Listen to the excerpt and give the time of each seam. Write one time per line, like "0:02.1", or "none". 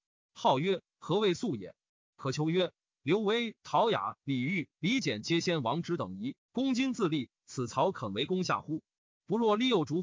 none